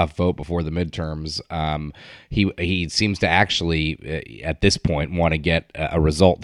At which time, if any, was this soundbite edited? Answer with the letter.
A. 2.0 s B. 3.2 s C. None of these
C